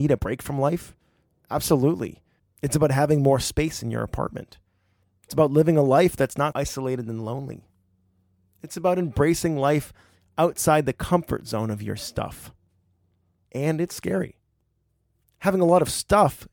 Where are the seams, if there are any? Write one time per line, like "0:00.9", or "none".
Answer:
0:02.4
0:06.5
0:13.5